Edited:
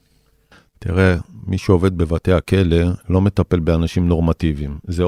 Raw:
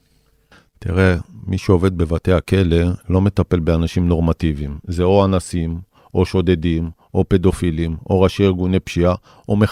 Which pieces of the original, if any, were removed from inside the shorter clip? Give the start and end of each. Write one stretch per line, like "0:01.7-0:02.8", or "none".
none